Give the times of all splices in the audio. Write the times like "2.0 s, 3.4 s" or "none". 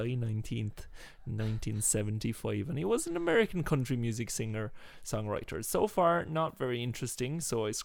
none